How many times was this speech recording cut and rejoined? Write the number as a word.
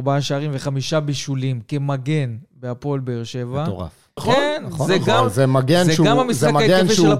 one